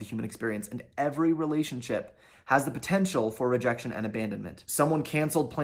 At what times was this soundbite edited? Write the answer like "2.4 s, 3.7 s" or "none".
4.7 s